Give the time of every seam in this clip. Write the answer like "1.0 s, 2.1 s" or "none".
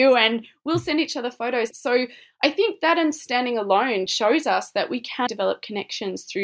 1.7 s, 5.3 s